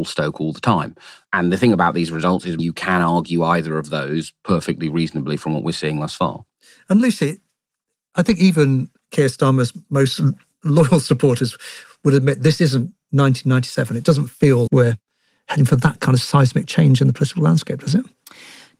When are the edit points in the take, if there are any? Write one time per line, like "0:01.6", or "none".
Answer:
0:14.7